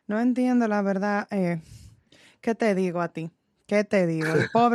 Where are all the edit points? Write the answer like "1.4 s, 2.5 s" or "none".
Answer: none